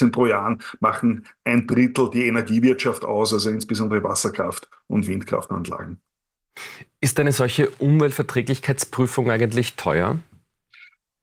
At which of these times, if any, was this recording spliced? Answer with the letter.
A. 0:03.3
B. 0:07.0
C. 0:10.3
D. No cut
D